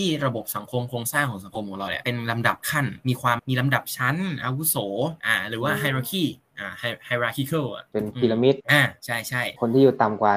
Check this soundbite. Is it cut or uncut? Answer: cut